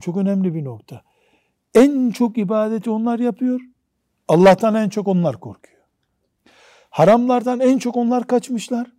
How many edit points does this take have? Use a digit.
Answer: 0